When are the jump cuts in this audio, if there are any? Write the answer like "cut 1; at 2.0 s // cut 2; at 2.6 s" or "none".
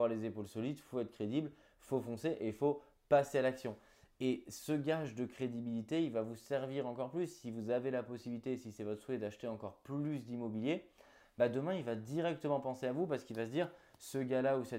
none